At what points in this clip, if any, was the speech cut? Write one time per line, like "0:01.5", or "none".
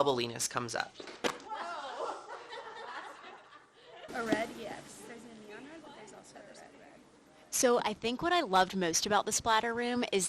0:04.1